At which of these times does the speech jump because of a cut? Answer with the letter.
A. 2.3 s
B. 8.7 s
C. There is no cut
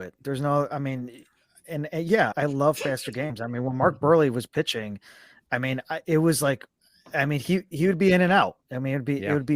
A